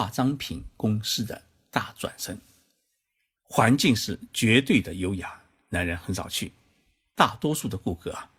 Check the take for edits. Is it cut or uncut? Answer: cut